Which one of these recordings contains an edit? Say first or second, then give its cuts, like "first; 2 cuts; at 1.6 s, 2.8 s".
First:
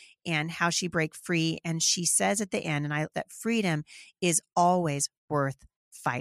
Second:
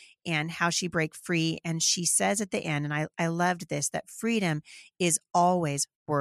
first; 1 cut; at 3.1 s